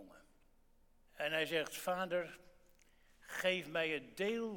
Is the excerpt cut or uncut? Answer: cut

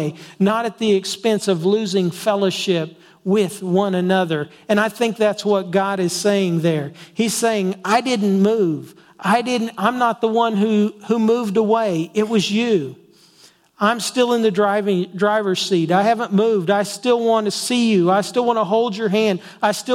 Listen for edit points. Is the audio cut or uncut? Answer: uncut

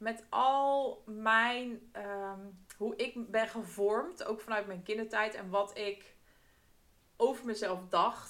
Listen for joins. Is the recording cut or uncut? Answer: uncut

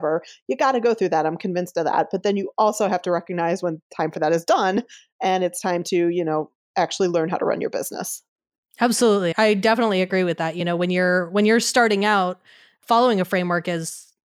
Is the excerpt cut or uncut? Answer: cut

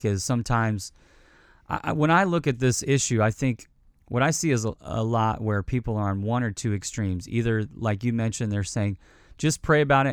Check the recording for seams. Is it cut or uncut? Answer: uncut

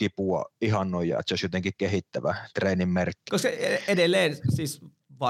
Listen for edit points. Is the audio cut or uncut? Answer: cut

